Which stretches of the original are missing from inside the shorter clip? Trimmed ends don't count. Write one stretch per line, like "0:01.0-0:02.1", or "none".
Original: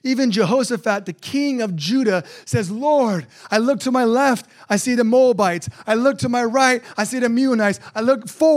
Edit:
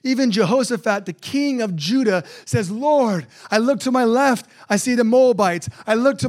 none